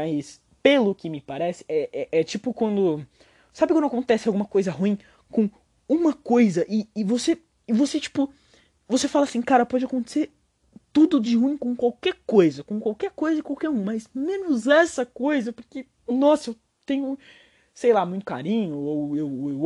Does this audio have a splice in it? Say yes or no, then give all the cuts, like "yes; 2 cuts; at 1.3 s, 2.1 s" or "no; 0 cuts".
no; 0 cuts